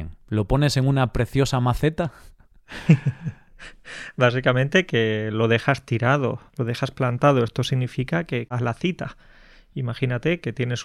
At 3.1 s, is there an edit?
no; 2 cuts; at 6.5 s, 8.5 s

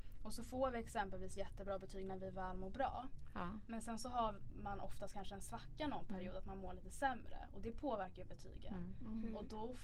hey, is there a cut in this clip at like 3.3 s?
no; 0 cuts

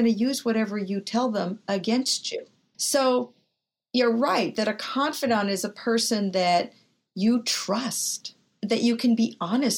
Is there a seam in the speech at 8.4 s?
no; 1 cut; at 2.7 s

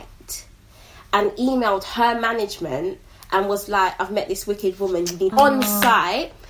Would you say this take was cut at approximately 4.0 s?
no; 1 cut; at 5.3 s

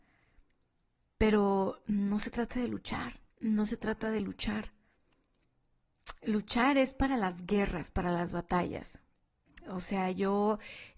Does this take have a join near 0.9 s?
no; 2 cuts; at 3.3 s, 9.6 s

